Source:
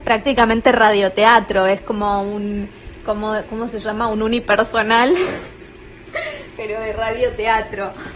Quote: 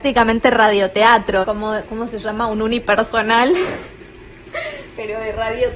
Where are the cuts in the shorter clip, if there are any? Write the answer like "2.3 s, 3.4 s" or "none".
1.4 s